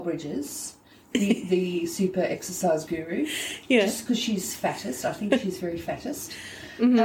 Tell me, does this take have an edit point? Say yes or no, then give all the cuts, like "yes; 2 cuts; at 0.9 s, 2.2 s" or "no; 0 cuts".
no; 0 cuts